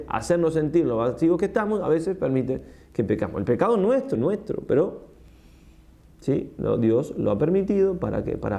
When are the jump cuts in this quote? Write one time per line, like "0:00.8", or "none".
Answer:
0:04.2